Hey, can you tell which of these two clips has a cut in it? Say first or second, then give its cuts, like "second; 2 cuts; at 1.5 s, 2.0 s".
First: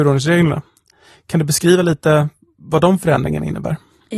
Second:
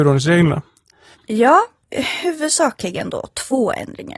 second; 1 cut; at 1.1 s